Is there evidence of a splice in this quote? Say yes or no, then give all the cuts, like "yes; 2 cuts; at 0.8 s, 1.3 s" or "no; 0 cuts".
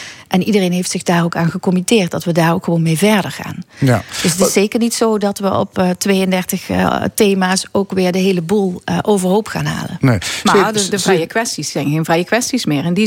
no; 0 cuts